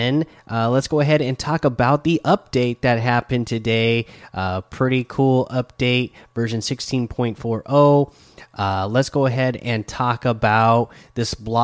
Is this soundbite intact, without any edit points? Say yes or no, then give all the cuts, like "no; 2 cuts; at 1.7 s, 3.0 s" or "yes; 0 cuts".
yes; 0 cuts